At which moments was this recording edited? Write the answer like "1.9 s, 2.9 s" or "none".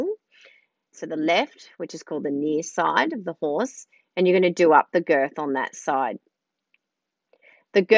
0.9 s